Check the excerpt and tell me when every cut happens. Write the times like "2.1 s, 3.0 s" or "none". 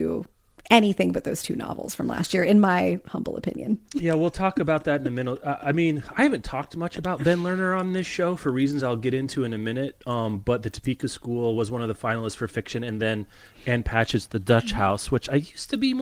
none